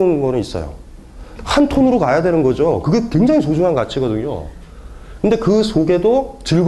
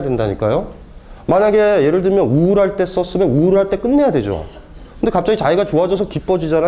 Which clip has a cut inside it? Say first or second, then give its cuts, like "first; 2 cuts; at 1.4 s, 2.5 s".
first; 2 cuts; at 1.4 s, 5.2 s